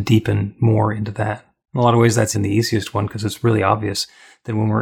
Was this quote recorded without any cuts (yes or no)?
no